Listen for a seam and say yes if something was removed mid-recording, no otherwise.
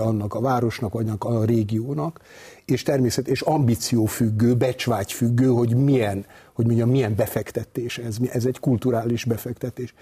no